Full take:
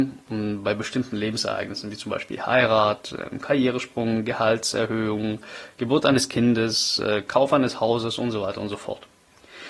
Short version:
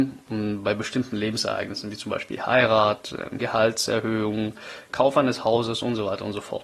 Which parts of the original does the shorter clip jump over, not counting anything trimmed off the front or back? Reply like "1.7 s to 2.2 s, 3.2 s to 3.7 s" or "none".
3.4 s to 4.3 s, 5.8 s to 7.3 s